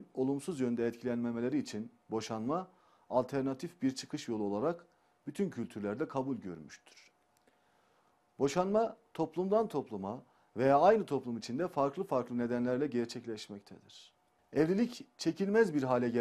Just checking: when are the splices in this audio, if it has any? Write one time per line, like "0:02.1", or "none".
0:14.4